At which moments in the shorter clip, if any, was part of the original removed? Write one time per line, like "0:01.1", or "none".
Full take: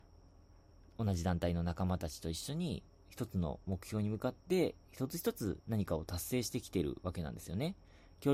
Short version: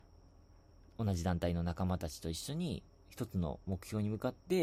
none